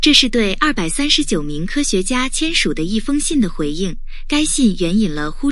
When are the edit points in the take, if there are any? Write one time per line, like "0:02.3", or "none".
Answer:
none